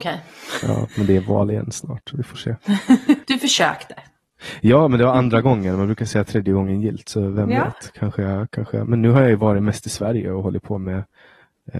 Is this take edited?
yes; 1 cut; at 3.2 s

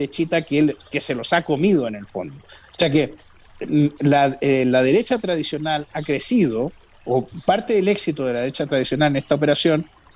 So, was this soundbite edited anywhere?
no; 0 cuts

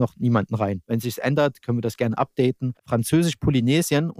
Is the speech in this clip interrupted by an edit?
yes; 1 cut; at 2.8 s

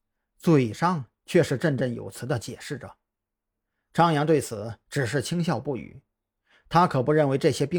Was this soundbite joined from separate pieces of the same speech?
no; 0 cuts

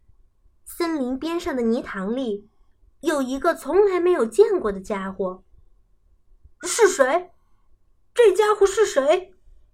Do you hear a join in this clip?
no; 0 cuts

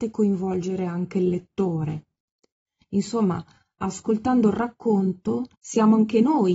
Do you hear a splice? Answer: yes; 1 cut; at 5.5 s

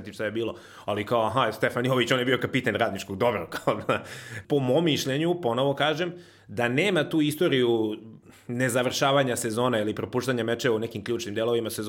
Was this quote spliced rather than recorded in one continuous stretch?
yes; 1 cut; at 4.4 s

